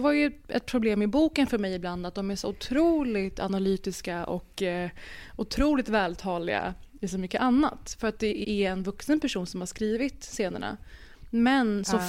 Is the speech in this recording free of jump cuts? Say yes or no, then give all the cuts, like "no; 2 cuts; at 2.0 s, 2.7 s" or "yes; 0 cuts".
no; 1 cut; at 8.4 s